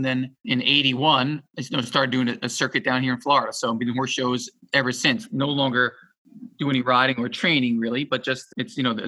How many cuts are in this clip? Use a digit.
0